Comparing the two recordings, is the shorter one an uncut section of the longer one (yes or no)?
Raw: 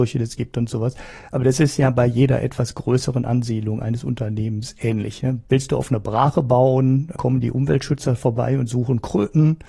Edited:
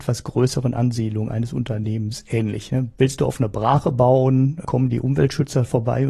yes